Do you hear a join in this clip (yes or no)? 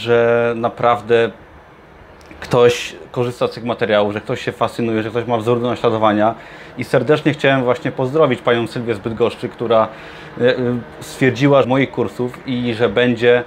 yes